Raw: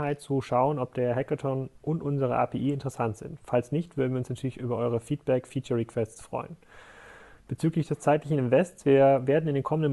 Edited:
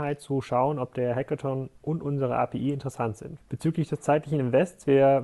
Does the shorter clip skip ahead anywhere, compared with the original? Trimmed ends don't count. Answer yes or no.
yes